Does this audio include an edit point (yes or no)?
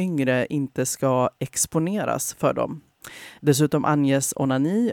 yes